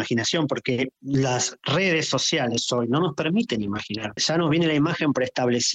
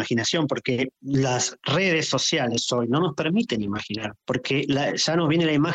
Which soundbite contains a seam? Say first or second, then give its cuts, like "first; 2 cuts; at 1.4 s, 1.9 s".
first; 1 cut; at 4.2 s